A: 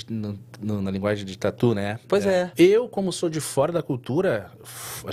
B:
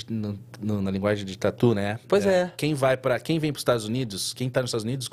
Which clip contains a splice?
A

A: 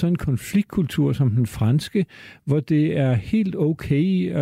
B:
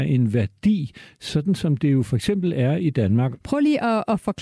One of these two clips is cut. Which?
B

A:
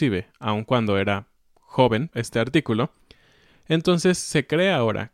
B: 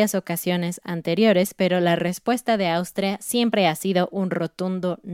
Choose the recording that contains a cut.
A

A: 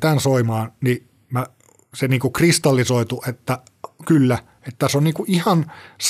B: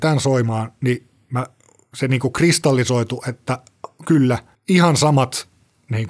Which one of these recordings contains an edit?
B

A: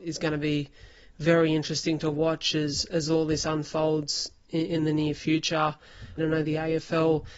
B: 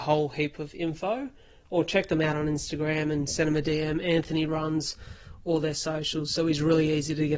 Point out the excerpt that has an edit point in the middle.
A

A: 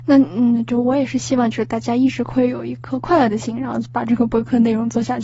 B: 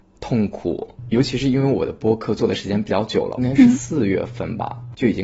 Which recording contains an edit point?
B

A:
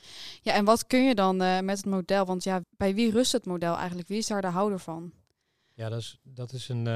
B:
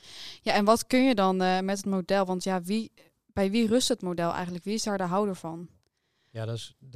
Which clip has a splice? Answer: A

